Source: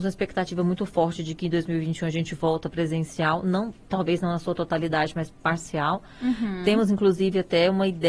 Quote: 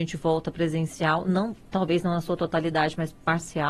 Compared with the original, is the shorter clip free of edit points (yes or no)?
yes